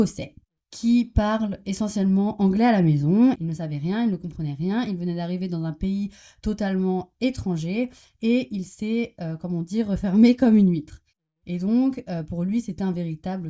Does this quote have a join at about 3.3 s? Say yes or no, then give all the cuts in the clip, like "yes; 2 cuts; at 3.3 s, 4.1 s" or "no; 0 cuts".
yes; 1 cut; at 3.3 s